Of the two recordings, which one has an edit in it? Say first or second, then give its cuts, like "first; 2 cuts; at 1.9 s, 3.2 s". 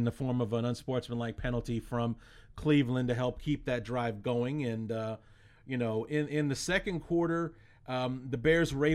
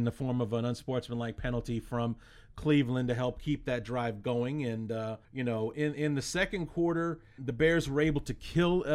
second; 2 cuts; at 5.2 s, 7.4 s